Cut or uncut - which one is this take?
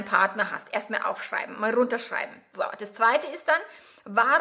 uncut